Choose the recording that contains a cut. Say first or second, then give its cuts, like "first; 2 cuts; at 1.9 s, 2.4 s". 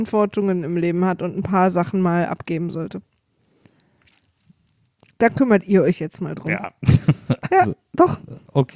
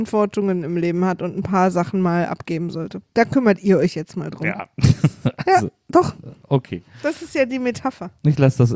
second; 1 cut; at 3.1 s